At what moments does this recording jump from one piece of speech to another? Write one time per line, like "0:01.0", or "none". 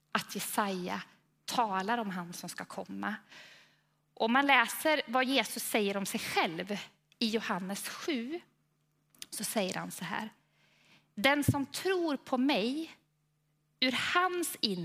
none